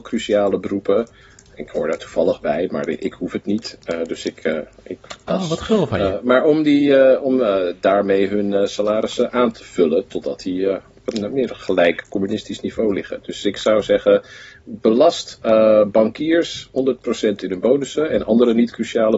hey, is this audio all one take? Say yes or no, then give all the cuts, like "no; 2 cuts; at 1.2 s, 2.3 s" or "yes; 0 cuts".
yes; 0 cuts